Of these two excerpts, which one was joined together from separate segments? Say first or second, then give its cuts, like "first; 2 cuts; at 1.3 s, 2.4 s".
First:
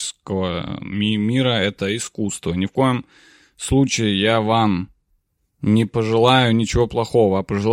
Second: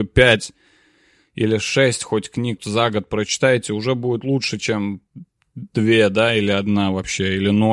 second; 1 cut; at 2.6 s